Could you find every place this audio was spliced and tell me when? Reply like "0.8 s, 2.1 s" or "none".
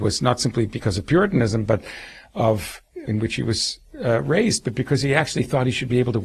3.0 s